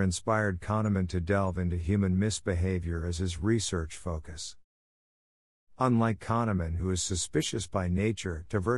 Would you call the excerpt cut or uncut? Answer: uncut